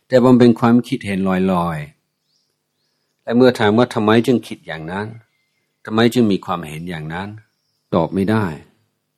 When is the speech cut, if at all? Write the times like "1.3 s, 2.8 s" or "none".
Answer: none

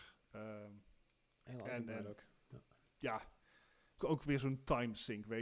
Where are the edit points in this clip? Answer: 4.0 s

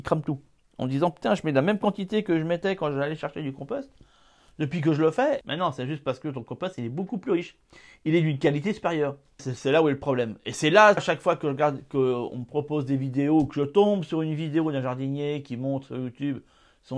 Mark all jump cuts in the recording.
5.4 s, 9.4 s, 11.0 s

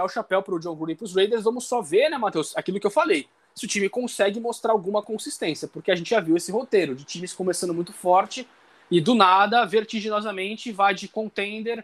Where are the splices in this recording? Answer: none

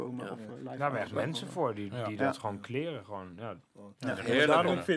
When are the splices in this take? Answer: none

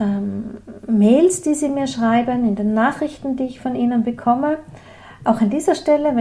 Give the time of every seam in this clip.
none

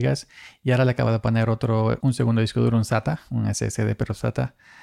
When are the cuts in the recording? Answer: 2.0 s

